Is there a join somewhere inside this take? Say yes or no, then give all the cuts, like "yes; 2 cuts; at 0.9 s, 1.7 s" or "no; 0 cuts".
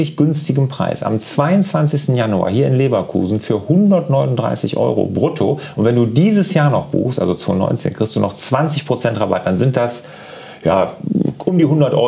no; 0 cuts